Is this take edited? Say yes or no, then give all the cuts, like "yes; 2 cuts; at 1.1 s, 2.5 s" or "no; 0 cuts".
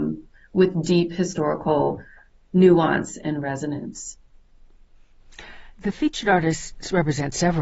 no; 0 cuts